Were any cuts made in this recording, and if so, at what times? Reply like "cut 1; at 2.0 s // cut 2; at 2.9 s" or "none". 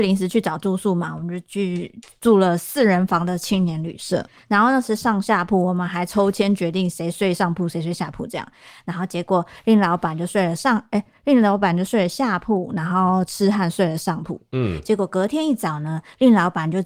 none

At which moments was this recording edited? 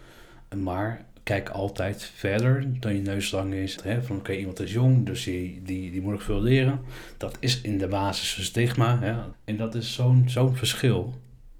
cut 1; at 3.8 s // cut 2; at 9.3 s

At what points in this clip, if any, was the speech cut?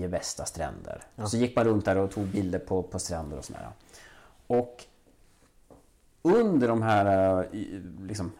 none

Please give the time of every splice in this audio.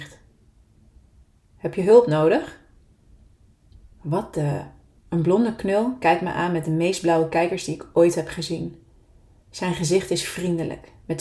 cut 1; at 4.9 s

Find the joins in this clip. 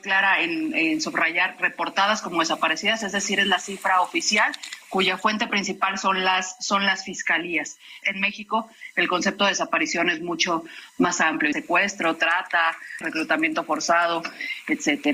cut 1; at 8.0 s // cut 2; at 11.5 s // cut 3; at 13.0 s

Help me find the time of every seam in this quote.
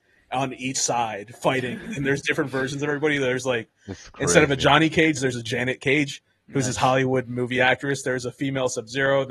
none

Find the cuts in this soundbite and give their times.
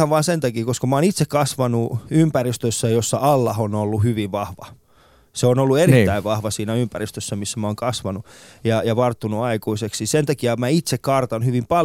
none

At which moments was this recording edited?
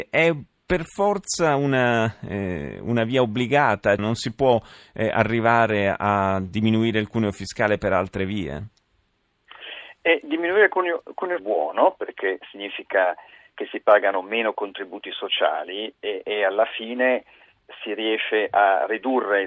cut 1; at 4.0 s // cut 2; at 11.4 s

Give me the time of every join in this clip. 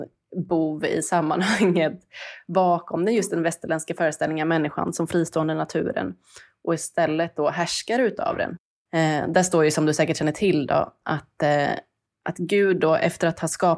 cut 1; at 8.9 s

